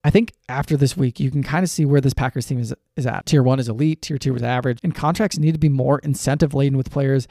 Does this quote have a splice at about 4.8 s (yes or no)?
yes